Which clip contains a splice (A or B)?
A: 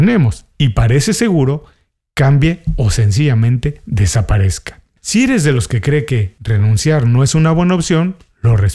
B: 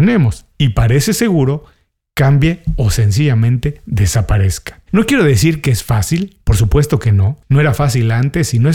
B